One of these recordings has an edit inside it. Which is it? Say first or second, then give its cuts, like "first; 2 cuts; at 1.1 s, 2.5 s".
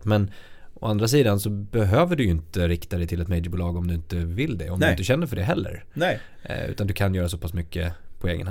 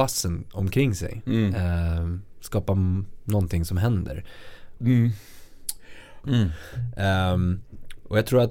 second; 2 cuts; at 4.8 s, 6.2 s